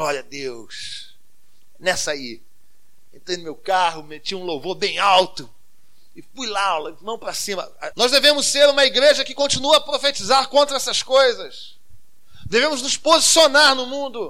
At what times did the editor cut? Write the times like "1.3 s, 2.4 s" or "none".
7.9 s